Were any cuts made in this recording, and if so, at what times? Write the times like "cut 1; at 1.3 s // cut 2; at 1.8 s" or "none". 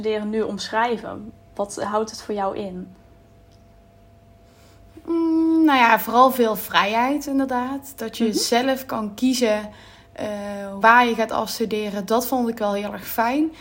cut 1; at 10.8 s

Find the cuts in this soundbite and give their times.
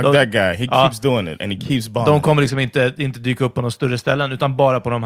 none

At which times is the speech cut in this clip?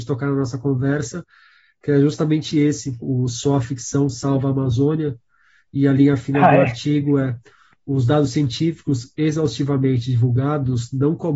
cut 1; at 3.0 s

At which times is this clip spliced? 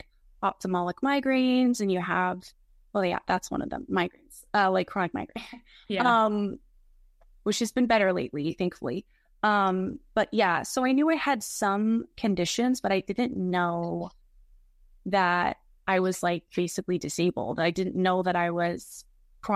none

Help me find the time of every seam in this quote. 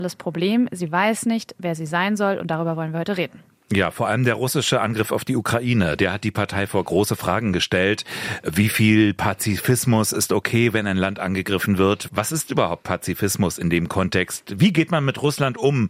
none

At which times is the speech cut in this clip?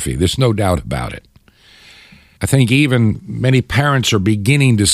cut 1; at 2.4 s

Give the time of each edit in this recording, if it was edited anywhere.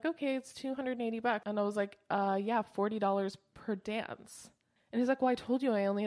cut 1; at 1.4 s

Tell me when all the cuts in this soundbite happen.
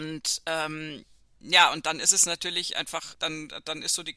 cut 1; at 3.1 s

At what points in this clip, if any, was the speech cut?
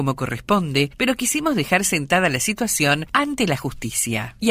cut 1; at 1.0 s

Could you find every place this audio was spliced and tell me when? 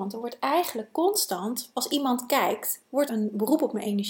cut 1; at 1.7 s // cut 2; at 3.1 s

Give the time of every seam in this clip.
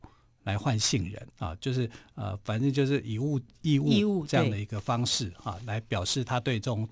cut 1; at 1.3 s

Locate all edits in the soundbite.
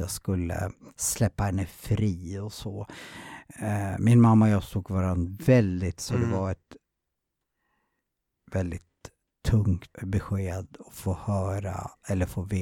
cut 1; at 6.0 s // cut 2; at 9.9 s

